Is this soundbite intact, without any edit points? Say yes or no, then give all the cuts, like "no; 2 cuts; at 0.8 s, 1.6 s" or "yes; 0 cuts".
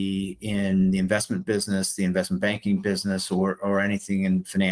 yes; 0 cuts